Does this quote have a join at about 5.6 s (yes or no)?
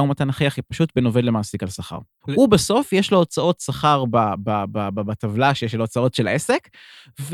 yes